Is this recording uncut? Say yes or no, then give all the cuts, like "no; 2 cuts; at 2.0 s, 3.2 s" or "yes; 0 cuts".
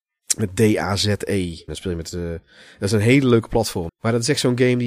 no; 2 cuts; at 1.7 s, 3.9 s